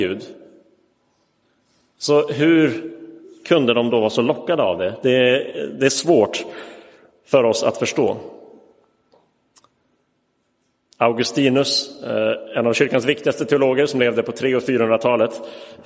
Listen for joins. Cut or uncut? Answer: uncut